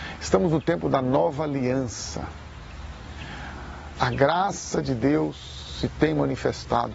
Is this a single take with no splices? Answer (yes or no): no